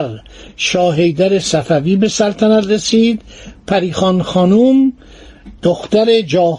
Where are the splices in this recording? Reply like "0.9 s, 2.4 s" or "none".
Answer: 5.6 s